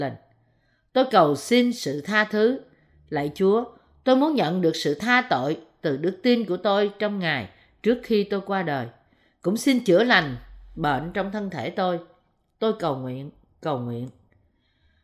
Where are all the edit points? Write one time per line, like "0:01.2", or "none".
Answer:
none